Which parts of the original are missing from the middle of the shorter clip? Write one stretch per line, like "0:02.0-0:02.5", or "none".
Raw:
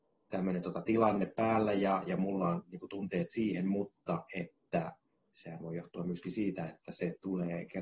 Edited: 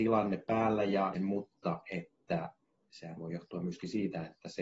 0:02.0-0:03.6